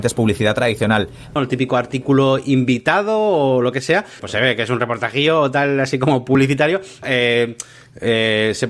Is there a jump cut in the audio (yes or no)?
yes